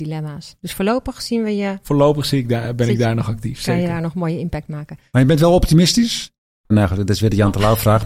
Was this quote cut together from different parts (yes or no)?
yes